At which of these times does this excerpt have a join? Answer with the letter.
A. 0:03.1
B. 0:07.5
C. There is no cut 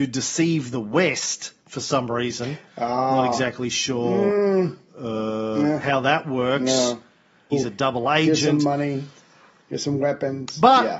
B